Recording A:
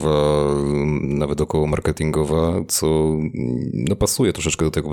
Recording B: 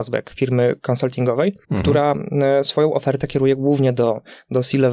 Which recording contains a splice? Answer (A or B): B